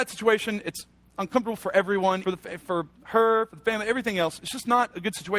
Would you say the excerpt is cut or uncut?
cut